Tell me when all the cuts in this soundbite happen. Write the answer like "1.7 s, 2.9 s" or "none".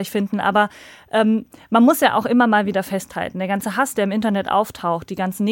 none